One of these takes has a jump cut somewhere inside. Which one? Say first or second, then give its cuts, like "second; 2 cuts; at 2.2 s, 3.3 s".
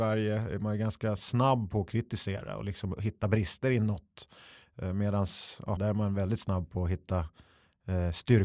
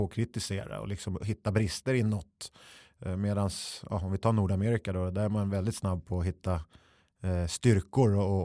first; 1 cut; at 5.8 s